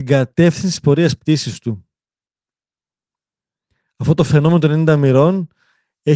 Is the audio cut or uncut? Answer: uncut